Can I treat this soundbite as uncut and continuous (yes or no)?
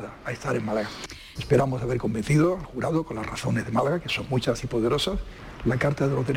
no